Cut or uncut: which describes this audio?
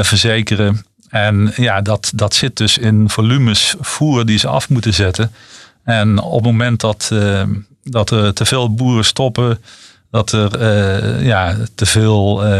uncut